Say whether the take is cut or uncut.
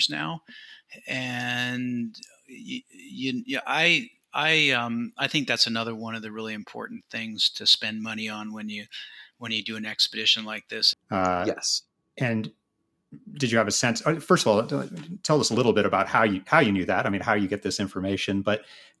cut